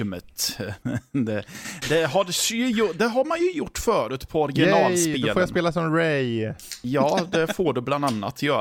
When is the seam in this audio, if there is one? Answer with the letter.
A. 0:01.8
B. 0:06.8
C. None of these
A